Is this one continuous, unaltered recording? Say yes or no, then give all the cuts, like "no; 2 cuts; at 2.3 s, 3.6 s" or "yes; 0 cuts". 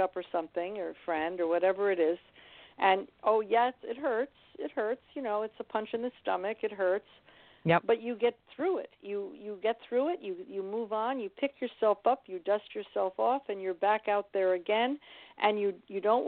yes; 0 cuts